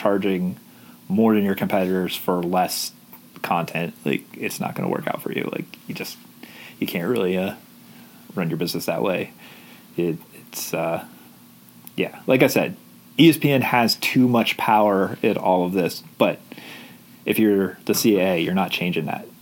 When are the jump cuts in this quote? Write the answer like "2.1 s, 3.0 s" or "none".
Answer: none